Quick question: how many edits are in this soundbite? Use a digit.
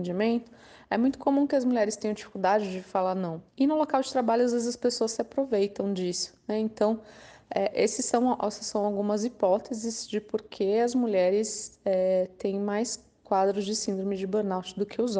0